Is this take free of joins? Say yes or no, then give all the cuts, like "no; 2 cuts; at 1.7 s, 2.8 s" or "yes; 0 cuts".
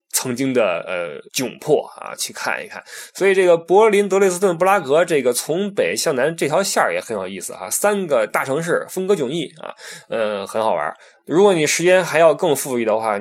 no; 1 cut; at 1.3 s